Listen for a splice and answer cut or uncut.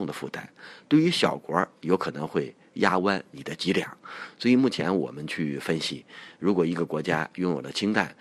uncut